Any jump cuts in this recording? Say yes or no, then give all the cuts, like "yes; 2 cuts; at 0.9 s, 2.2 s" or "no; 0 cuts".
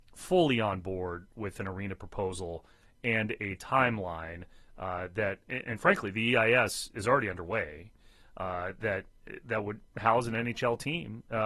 no; 0 cuts